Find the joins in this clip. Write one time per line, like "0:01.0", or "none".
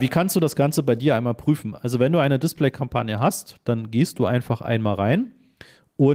none

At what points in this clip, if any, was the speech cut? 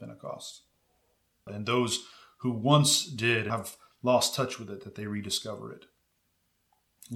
0:01.5
0:03.5

